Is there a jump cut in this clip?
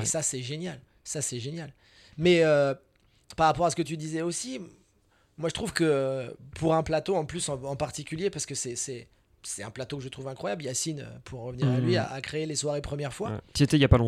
no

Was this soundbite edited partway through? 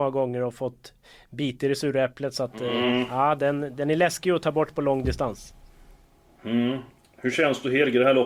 no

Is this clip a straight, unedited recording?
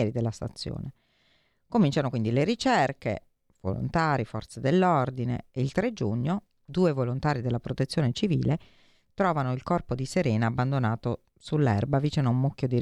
yes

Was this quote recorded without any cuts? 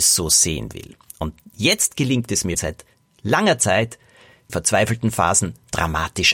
no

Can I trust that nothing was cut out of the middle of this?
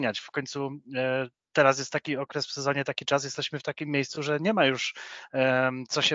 yes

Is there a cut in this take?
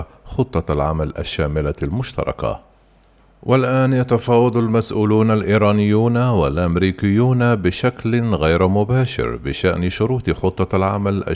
no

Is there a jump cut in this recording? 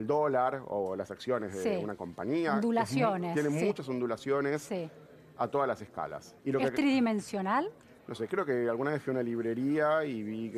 yes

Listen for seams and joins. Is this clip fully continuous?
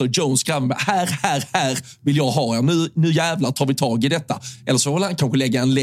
yes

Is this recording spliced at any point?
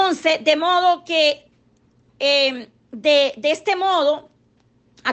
no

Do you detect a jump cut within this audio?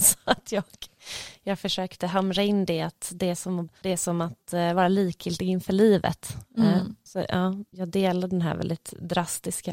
yes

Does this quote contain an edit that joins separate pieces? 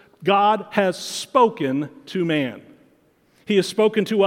no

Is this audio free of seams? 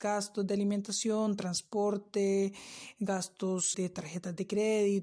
no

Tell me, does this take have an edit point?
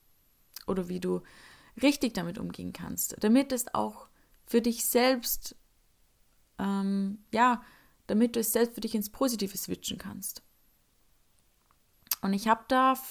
no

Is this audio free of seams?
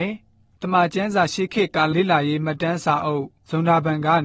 no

